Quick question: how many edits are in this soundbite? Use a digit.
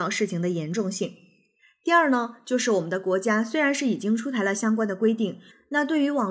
0